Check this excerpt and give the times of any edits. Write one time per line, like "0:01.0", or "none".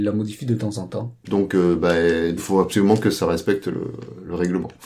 0:01.2
0:02.4